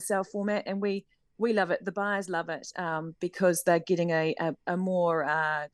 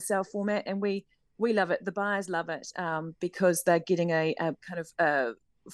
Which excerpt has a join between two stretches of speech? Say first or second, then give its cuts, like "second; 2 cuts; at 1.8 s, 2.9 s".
second; 1 cut; at 4.6 s